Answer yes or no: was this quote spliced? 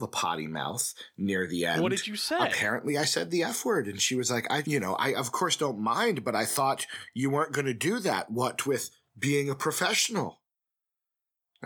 yes